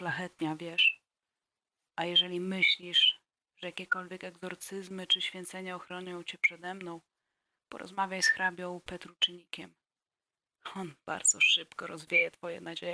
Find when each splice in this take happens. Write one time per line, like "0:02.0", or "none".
0:01.9